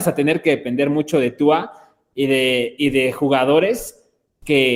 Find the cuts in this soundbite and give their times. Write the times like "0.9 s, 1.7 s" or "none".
none